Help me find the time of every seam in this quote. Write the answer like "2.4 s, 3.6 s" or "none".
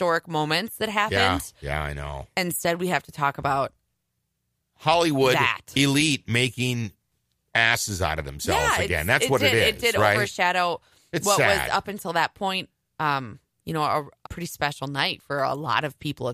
14.2 s